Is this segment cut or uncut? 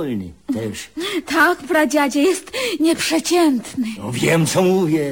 cut